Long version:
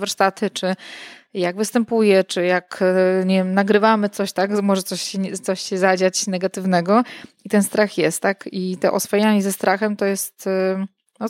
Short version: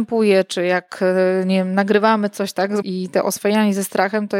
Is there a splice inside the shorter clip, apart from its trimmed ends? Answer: yes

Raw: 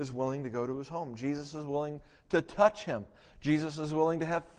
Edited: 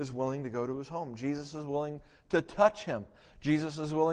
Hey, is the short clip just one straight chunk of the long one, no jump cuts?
yes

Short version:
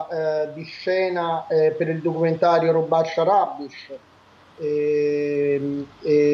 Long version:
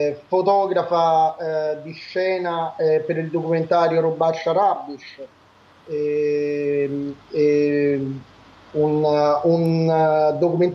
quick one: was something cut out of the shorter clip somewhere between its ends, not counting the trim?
no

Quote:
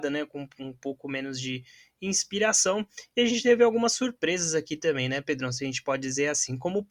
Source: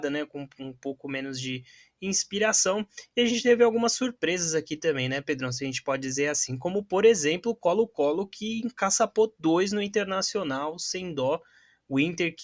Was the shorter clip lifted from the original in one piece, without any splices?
yes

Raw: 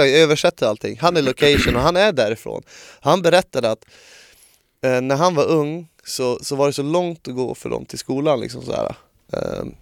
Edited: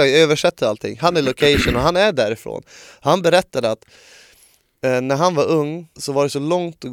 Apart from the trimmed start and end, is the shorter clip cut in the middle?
yes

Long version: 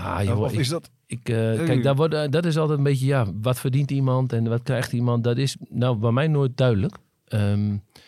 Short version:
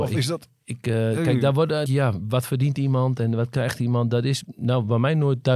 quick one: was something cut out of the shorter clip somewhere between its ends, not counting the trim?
yes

